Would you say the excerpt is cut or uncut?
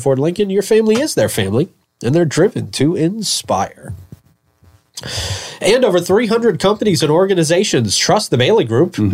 uncut